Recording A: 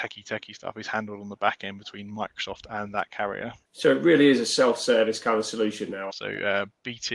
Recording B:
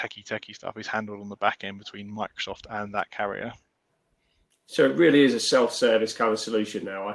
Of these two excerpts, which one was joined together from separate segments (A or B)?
A